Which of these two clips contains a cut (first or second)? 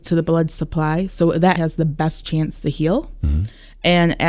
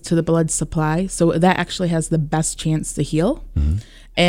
first